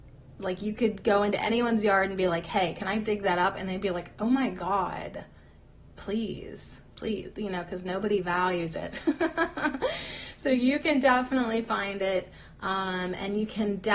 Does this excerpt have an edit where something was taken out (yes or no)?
no